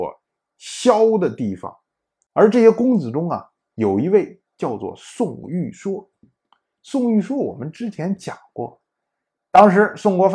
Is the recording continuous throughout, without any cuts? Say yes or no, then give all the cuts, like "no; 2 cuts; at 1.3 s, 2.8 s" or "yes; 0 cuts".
yes; 0 cuts